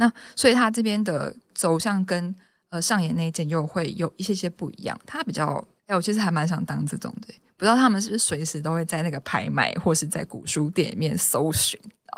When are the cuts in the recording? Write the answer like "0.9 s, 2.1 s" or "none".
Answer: 5.8 s